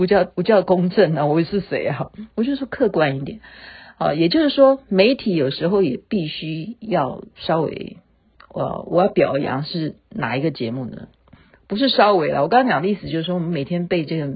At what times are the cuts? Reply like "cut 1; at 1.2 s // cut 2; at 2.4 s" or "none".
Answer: none